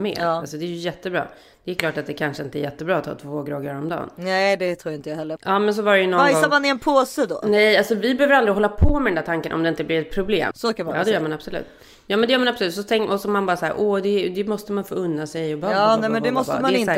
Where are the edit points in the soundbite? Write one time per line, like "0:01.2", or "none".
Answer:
0:05.4
0:10.5